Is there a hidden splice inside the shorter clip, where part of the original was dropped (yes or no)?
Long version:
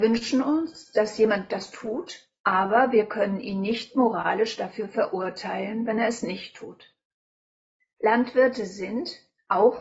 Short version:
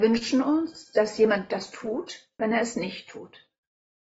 yes